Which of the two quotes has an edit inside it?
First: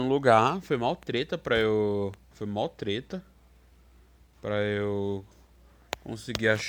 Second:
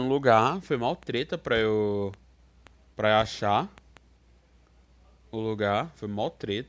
first; 1 cut; at 2.3 s

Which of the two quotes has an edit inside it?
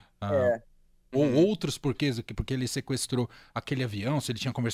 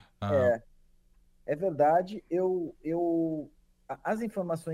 first; 1 cut; at 1.1 s

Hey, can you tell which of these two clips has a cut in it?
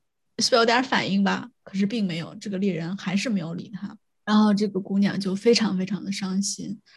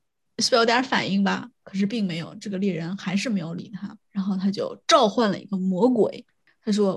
second; 1 cut; at 4.0 s

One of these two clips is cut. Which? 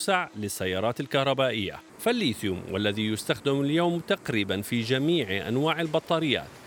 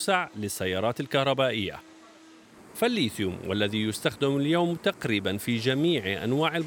first; 1 cut; at 1.9 s

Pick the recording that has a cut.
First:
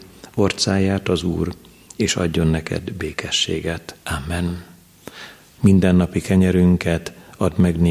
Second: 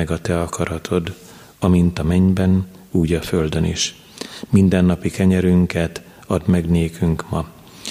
first; 2 cuts; at 4.0 s, 5.6 s

